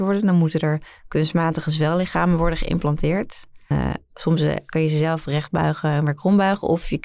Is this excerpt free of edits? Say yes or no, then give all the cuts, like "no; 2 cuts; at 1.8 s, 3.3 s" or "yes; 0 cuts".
no; 1 cut; at 3.7 s